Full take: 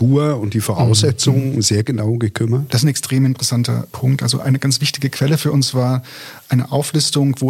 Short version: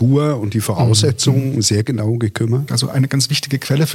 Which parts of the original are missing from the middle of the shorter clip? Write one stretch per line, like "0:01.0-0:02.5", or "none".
0:02.7-0:04.2